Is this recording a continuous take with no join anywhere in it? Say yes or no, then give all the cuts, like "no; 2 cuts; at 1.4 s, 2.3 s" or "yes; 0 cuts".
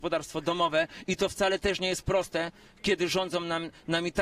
yes; 0 cuts